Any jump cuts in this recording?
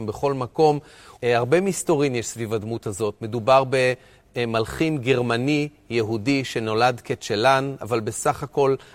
yes; 1 cut; at 1.2 s

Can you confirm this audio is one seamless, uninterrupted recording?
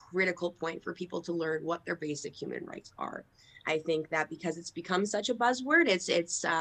yes; 0 cuts

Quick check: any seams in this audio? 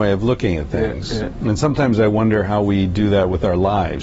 no; 0 cuts

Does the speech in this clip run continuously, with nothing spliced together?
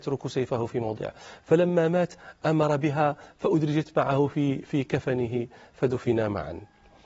yes; 0 cuts

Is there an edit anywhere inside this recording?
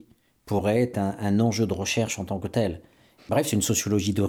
yes; 1 cut; at 3.2 s

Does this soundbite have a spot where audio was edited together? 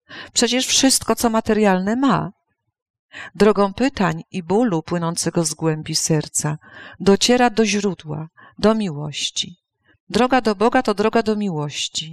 no; 0 cuts

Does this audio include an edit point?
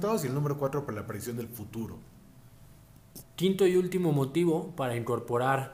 yes; 1 cut; at 3.2 s

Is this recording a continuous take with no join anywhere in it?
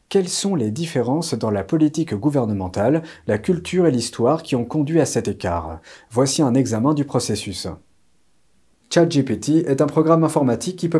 yes; 0 cuts

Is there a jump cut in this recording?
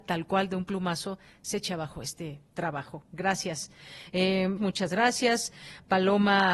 yes; 1 cut; at 4.6 s

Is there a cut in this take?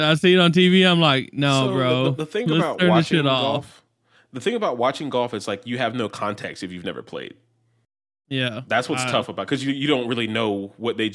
no; 0 cuts

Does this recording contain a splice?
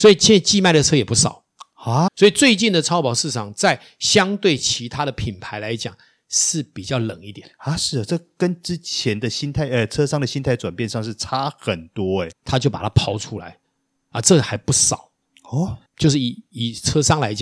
yes; 3 cuts; at 2.1 s, 12.3 s, 15.9 s

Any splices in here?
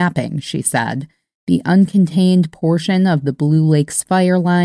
no; 0 cuts

